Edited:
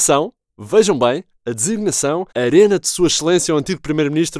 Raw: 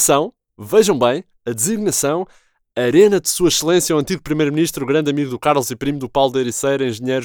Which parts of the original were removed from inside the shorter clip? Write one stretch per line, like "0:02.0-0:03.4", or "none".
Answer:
0:02.3-0:02.7